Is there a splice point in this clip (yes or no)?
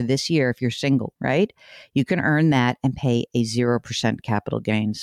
yes